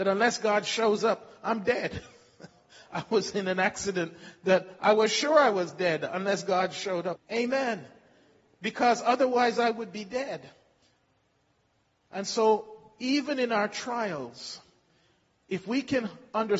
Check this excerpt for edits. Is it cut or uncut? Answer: cut